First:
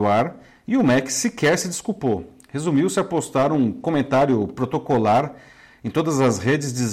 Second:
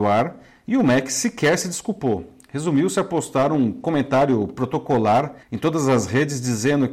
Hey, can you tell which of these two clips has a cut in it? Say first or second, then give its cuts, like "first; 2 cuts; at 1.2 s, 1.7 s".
second; 1 cut; at 5.4 s